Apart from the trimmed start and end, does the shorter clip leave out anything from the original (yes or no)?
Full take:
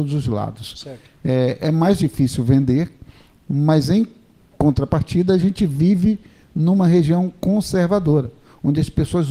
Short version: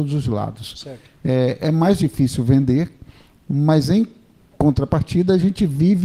no